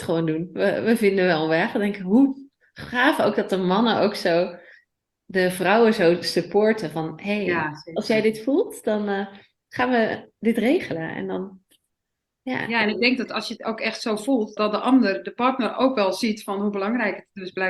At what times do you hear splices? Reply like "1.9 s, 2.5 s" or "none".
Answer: 14.6 s